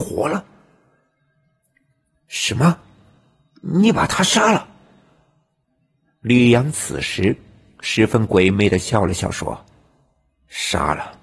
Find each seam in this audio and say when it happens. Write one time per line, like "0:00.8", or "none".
none